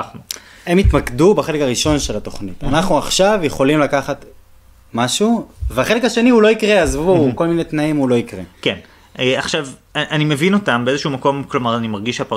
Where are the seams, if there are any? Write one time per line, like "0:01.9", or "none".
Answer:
none

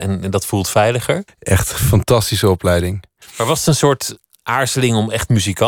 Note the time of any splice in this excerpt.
0:01.3
0:03.2

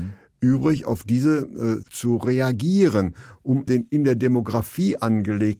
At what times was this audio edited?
0:01.8
0:03.7

